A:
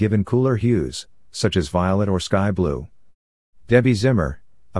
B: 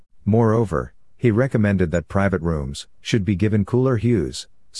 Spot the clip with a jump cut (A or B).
B